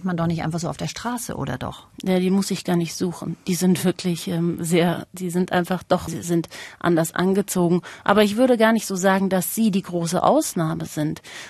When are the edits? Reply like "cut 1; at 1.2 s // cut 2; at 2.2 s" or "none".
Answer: cut 1; at 6.1 s